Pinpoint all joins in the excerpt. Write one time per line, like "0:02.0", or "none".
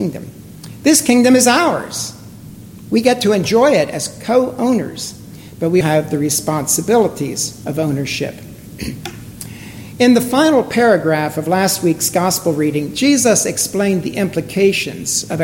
0:05.8